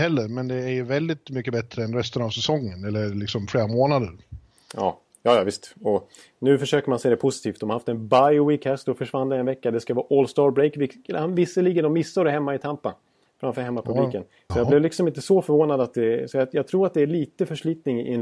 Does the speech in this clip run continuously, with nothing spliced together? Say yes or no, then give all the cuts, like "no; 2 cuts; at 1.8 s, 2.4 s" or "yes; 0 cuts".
no; 1 cut; at 14.5 s